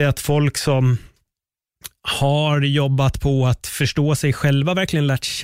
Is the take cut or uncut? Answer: uncut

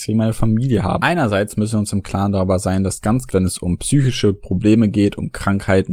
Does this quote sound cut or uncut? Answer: cut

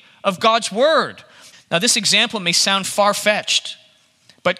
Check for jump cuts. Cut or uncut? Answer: cut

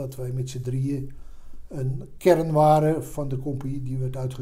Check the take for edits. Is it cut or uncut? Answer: uncut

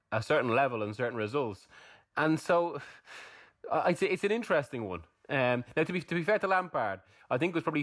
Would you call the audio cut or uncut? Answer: uncut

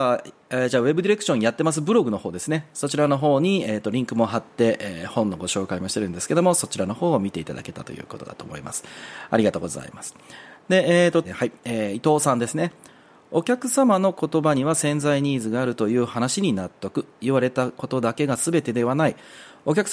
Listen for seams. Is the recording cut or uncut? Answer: cut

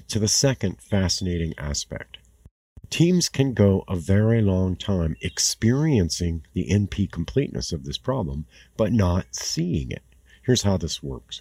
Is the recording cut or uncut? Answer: uncut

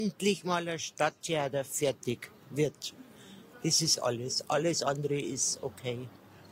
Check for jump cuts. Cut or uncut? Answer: cut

